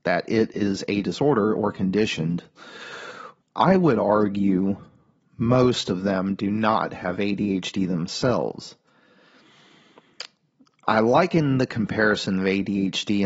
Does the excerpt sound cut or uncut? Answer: cut